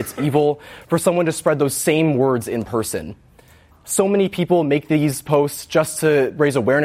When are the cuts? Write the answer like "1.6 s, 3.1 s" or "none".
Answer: 3.7 s

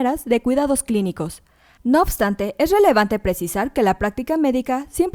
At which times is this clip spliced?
1.8 s

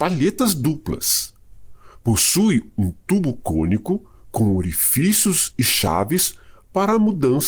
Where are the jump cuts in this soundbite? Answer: none

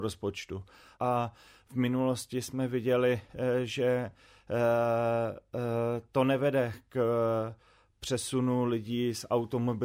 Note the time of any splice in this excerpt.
0.9 s

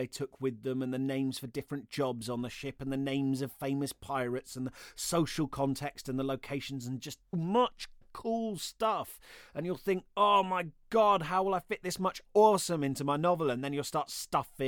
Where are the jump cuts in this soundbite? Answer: 7.3 s

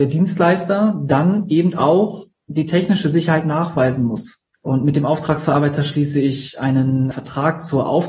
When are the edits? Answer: 4.5 s, 7.1 s

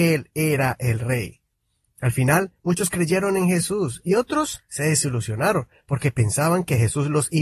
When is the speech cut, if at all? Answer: none

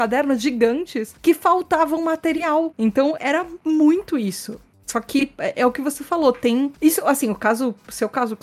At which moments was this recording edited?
2.8 s

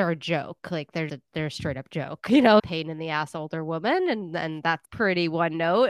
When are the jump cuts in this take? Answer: 1.1 s, 2.6 s, 4.8 s

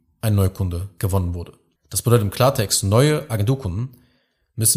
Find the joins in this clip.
1.7 s

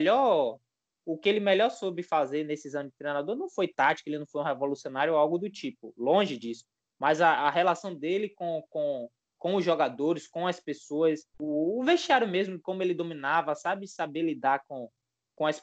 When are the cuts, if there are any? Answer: 11.3 s

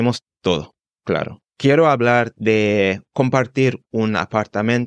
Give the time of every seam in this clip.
1.5 s

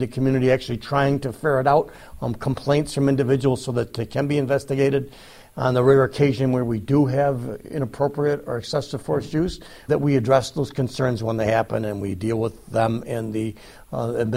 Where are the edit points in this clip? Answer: 9.9 s

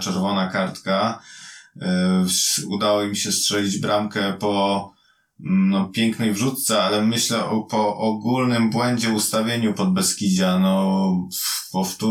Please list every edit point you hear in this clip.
none

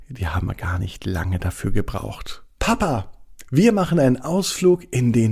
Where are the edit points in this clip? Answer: 2.6 s

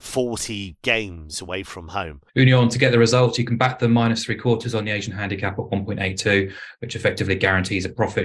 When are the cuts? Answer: 2.3 s

